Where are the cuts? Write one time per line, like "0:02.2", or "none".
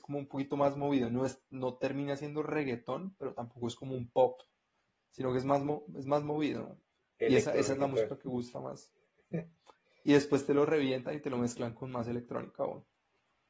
none